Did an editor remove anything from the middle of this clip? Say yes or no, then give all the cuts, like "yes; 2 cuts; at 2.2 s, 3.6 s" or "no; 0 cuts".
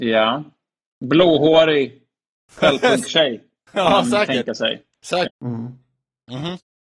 yes; 1 cut; at 5.3 s